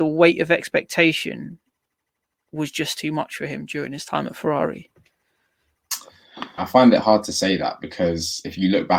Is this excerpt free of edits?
no; 1 cut; at 6.6 s

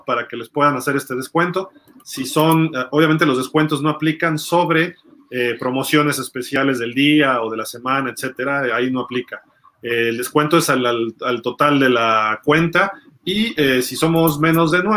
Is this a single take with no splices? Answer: yes; 0 cuts

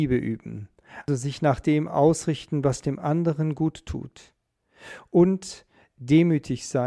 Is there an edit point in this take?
no; 0 cuts

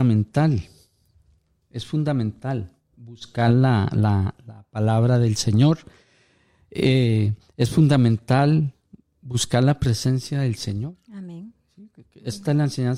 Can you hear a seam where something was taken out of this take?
no; 0 cuts

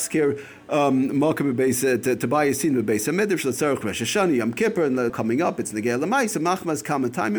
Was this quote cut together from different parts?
yes; 1 cut; at 5.1 s

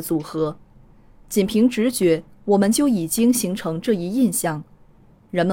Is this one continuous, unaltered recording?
yes; 0 cuts

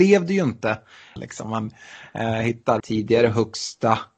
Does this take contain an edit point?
yes; 2 cuts; at 1.2 s, 2.8 s

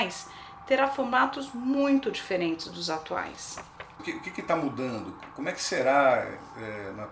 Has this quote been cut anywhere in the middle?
yes; 1 cut; at 4.0 s

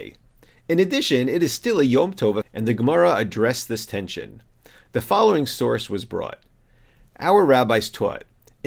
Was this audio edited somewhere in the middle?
yes; 1 cut; at 2.4 s

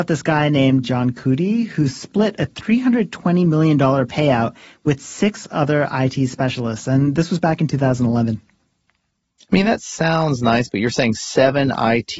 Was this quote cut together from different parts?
no; 0 cuts

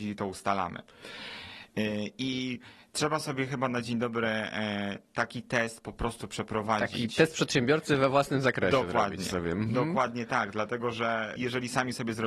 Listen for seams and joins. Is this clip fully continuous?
yes; 0 cuts

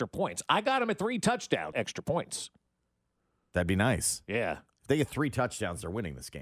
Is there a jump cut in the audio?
yes; 1 cut; at 1.7 s

